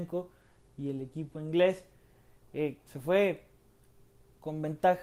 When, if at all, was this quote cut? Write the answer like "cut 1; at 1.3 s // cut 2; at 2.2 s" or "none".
cut 1; at 2.9 s